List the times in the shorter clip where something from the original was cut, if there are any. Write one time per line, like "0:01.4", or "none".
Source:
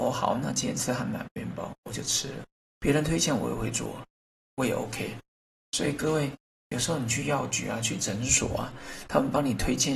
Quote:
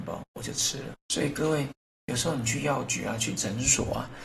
0:01.0